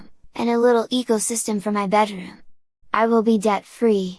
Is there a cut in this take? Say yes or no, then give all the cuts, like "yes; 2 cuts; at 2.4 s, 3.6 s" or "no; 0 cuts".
yes; 1 cut; at 2.8 s